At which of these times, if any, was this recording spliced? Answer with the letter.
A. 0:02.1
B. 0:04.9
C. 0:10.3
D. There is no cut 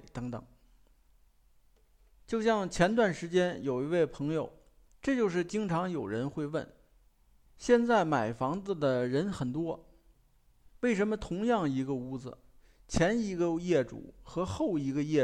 B